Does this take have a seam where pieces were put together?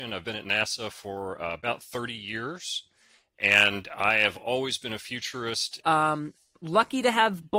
yes; 1 cut; at 5.8 s

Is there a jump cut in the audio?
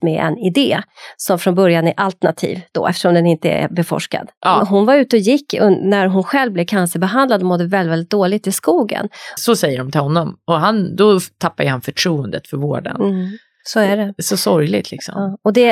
yes; 2 cuts; at 4.6 s, 9.4 s

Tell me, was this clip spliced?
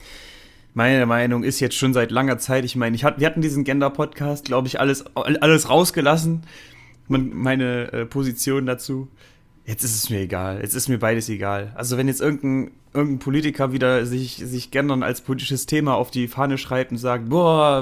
yes; 2 cuts; at 4.4 s, 7.3 s

